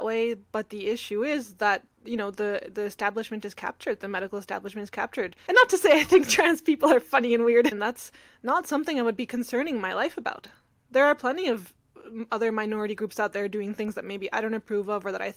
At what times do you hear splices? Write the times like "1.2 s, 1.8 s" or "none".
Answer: 5.5 s, 7.7 s